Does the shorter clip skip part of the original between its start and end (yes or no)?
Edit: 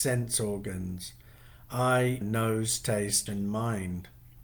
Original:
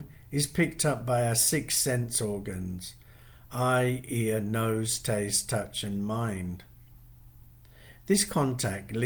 yes